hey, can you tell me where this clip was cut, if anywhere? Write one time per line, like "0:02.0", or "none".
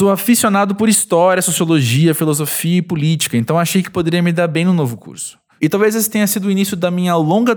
0:05.6